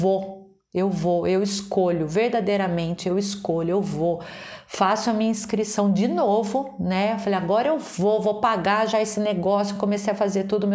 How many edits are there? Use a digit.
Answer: 0